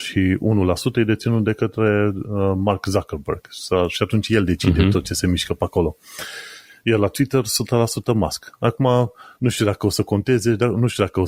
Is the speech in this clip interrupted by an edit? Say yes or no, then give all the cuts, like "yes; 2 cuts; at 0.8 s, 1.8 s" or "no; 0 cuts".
no; 0 cuts